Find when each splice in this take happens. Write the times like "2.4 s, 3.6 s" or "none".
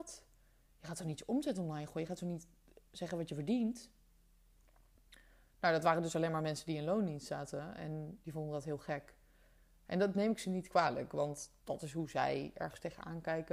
8.2 s, 11.6 s